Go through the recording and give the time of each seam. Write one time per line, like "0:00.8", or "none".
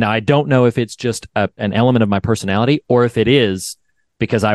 0:01.6